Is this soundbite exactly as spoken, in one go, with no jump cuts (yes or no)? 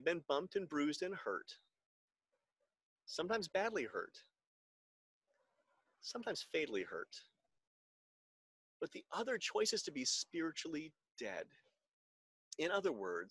yes